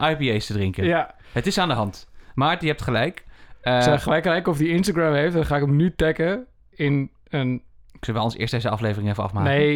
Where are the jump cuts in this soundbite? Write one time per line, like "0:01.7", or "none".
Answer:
none